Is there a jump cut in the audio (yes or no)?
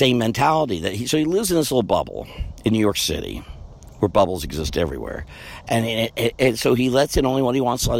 no